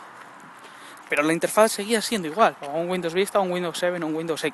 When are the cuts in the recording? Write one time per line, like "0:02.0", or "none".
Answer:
0:01.0
0:02.5